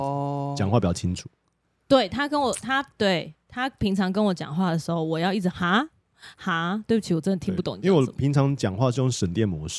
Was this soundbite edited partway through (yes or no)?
no